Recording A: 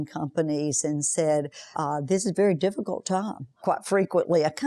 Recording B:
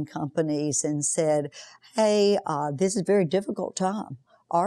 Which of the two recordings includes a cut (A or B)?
A